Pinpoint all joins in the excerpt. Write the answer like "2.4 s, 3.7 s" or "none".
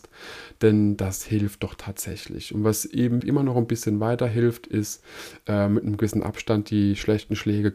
3.2 s